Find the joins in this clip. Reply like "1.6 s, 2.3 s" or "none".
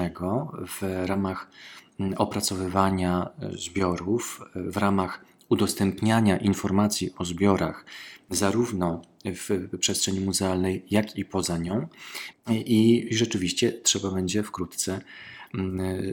12.3 s